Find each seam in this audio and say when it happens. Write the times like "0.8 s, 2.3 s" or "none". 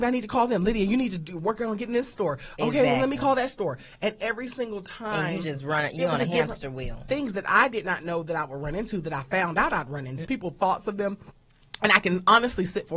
7.1 s, 10.2 s